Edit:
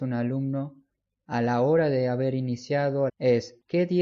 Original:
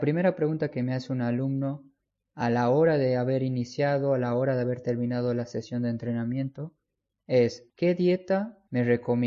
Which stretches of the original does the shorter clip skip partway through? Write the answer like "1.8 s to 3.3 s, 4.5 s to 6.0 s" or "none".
4.2 s to 7.2 s